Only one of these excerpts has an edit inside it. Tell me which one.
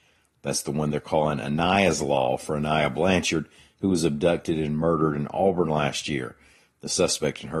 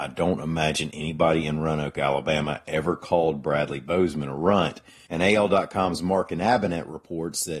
second; 1 cut; at 5.1 s

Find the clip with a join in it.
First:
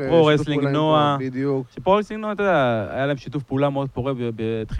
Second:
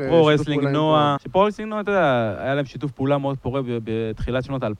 second; 1 cut; at 1.2 s

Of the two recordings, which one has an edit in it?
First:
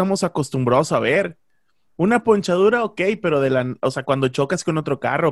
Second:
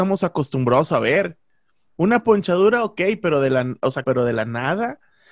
second; 1 cut; at 4.0 s

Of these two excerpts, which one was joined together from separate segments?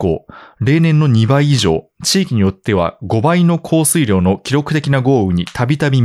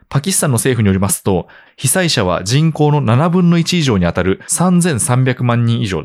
second; 1 cut; at 1.7 s

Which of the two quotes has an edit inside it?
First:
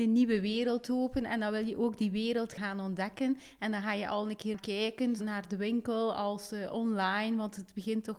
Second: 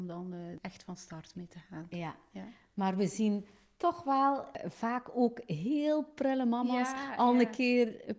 first; 1 cut; at 5.2 s

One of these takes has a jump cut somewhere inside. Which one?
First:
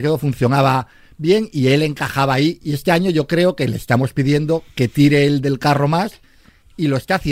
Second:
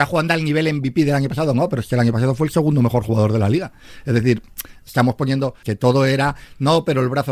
second; 1 cut; at 5.6 s

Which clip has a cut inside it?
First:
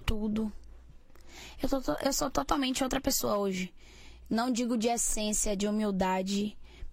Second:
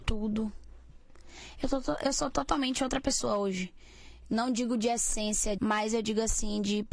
second; 1 cut; at 5.6 s

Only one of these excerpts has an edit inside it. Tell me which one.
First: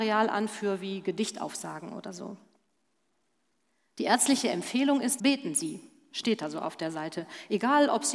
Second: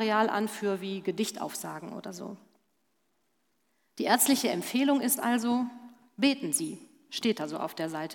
first; 1 cut; at 5.2 s

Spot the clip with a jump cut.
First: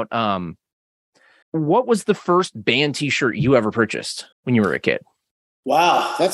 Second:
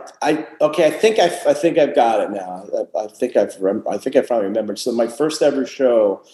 first; 2 cuts; at 1.4 s, 4.3 s

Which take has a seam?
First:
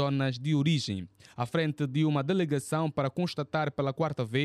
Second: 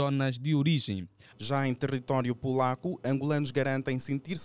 second; 1 cut; at 1.3 s

